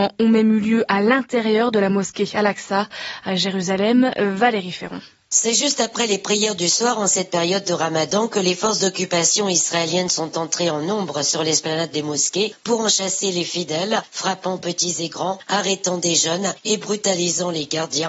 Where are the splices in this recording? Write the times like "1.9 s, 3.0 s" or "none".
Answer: none